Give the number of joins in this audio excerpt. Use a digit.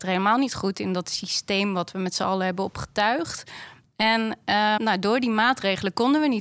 1